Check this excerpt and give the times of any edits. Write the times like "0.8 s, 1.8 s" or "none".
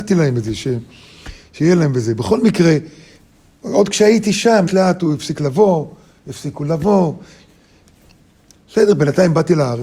4.7 s, 8.6 s